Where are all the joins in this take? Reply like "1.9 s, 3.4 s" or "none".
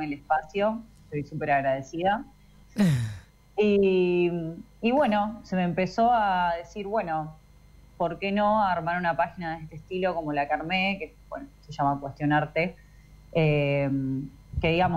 2.6 s